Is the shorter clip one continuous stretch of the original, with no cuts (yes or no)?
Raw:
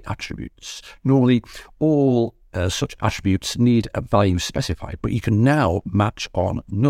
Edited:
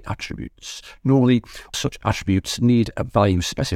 no